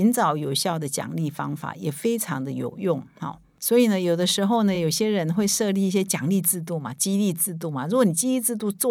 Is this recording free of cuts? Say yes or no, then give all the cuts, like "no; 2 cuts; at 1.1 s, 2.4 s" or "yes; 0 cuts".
yes; 0 cuts